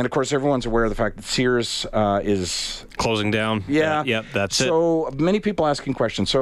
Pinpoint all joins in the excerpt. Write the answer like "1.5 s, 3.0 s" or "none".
none